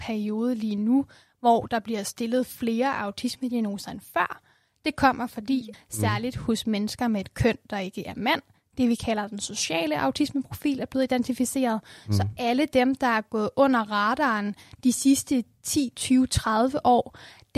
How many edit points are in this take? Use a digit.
1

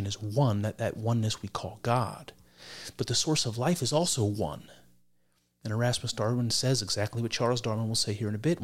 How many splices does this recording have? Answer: 0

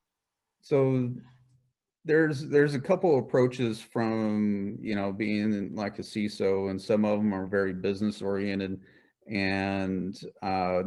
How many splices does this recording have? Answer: 0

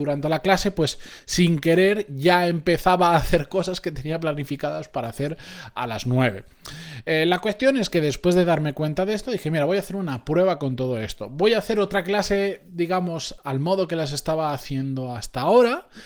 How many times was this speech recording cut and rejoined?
0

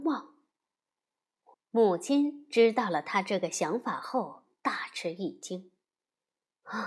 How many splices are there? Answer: 1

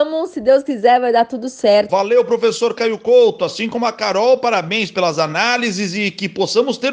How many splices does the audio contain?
1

